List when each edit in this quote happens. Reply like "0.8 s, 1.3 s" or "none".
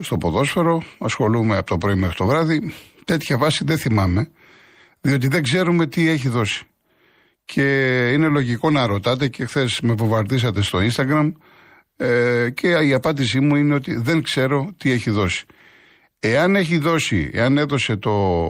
none